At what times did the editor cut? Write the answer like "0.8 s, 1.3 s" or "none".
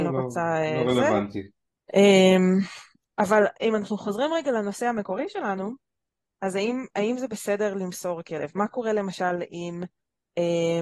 1.8 s

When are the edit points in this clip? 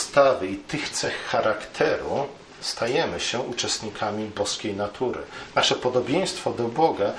none

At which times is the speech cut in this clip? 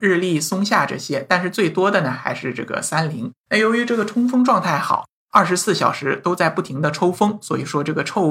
none

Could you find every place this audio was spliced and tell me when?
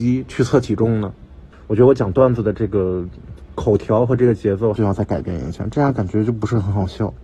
1.5 s, 4.8 s

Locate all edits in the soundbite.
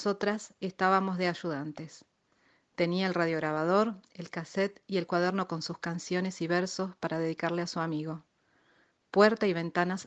none

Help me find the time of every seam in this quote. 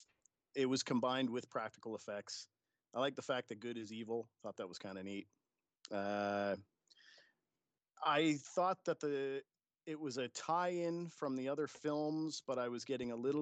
none

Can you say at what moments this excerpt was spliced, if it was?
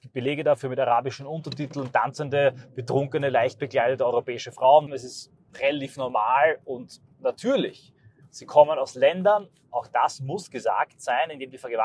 4.9 s

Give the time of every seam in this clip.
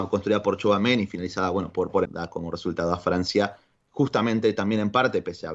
2.0 s

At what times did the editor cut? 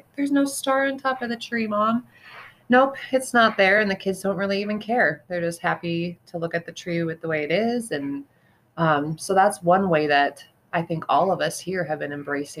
none

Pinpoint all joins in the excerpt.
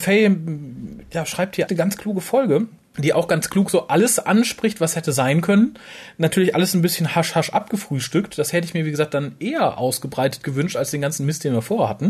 1.7 s

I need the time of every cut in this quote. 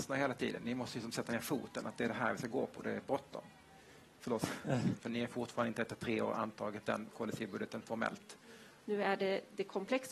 5.0 s, 8.8 s

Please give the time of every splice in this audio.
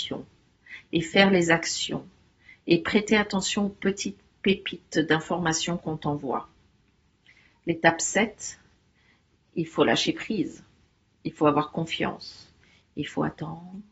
12.8 s

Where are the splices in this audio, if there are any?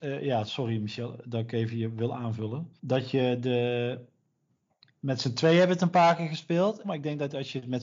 2.8 s, 6.8 s

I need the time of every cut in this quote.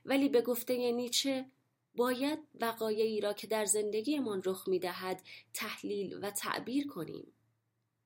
none

